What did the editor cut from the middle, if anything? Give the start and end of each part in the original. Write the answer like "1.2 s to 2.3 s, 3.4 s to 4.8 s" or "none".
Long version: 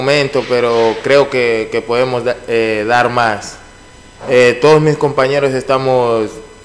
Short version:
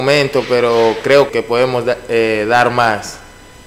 1.3 s to 1.7 s

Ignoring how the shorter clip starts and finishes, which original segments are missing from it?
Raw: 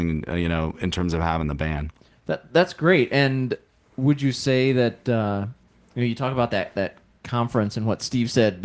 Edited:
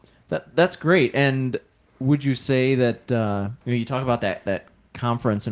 5.6 s to 5.9 s

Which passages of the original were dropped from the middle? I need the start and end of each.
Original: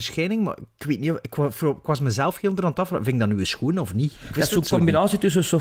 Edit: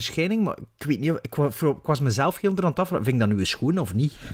none

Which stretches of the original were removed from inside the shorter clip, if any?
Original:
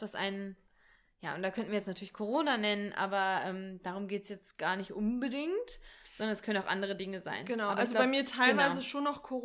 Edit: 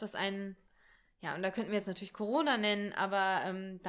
none

